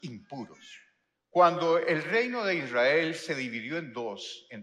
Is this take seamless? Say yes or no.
no